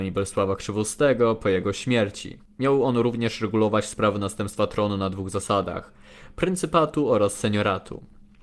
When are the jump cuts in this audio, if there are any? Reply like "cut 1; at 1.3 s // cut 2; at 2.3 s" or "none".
none